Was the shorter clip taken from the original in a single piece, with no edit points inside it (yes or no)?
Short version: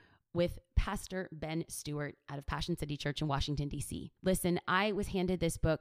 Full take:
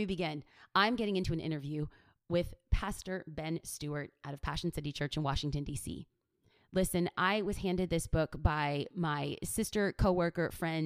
no